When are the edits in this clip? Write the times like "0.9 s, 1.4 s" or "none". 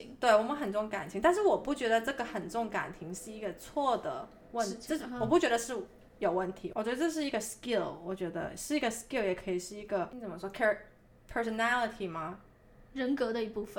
none